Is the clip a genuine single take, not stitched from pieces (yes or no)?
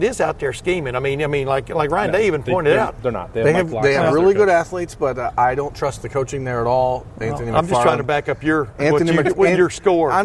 yes